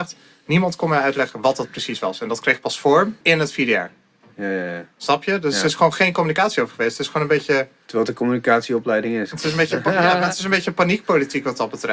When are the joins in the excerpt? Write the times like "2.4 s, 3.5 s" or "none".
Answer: 3.2 s